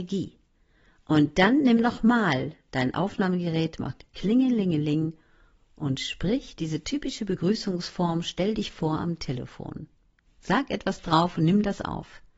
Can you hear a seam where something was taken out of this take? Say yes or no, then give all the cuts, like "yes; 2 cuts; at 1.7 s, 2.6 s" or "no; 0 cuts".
yes; 1 cut; at 10.3 s